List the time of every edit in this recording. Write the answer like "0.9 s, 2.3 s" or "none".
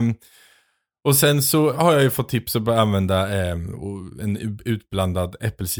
1.7 s